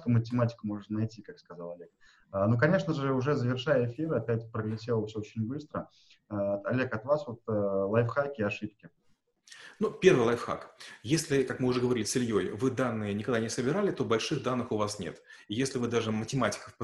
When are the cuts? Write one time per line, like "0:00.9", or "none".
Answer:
none

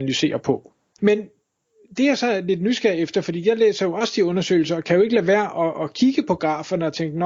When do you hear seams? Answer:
0:01.0

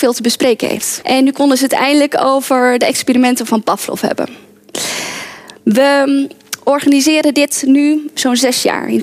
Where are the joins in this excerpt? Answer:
0:01.0

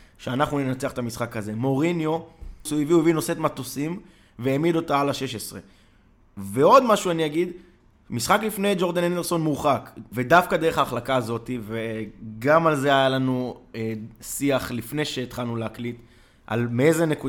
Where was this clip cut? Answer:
0:02.7
0:10.1

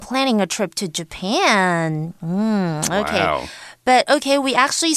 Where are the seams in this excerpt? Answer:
none

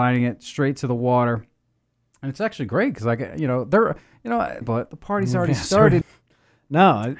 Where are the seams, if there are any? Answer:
0:04.6
0:06.0

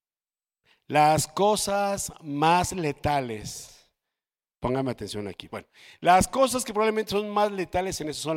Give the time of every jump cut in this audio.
0:05.5

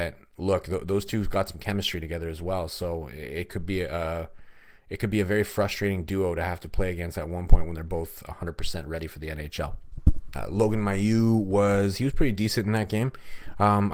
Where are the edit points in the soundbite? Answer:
0:10.3

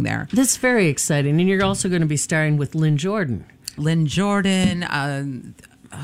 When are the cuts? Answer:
0:03.8

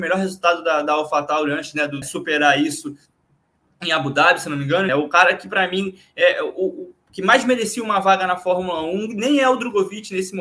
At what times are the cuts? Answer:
0:02.0
0:04.9

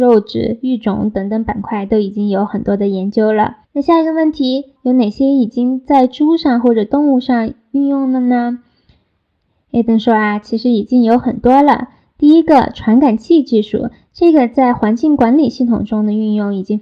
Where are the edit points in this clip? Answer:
0:03.6
0:04.8

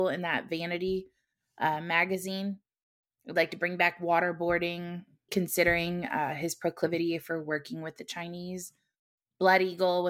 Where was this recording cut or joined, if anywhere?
0:05.3

